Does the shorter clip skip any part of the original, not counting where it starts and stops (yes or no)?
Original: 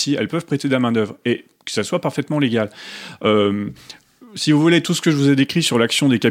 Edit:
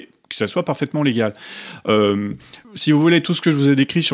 yes